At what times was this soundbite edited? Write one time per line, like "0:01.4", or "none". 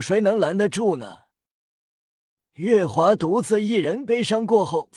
none